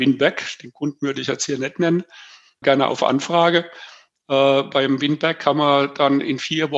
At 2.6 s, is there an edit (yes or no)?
yes